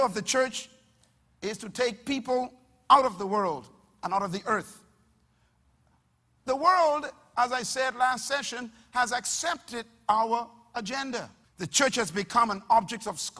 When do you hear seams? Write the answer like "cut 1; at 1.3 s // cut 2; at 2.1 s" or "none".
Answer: cut 1; at 11.4 s